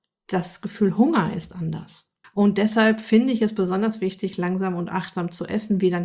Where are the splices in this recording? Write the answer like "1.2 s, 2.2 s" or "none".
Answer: 2.2 s